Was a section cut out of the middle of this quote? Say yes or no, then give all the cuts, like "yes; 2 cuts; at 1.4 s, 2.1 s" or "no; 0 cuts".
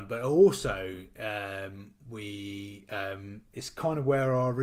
no; 0 cuts